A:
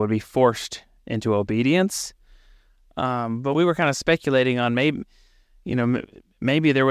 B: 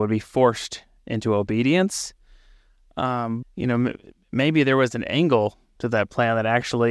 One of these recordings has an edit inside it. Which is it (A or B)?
B